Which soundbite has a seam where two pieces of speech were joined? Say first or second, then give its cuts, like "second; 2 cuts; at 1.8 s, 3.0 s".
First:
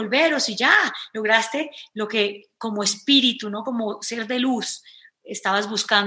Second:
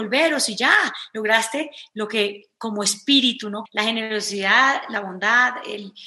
second; 1 cut; at 3.7 s